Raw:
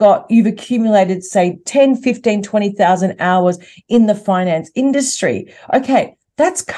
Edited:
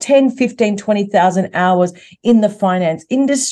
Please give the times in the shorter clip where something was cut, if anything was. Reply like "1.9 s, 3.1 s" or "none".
none